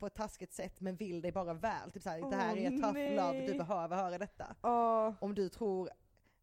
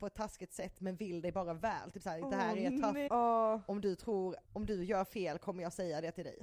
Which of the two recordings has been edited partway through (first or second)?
second